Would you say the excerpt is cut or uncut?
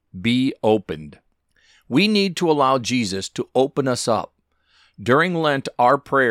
uncut